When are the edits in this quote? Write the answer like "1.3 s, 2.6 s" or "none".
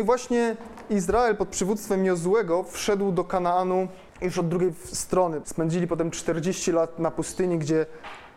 4.1 s, 5.4 s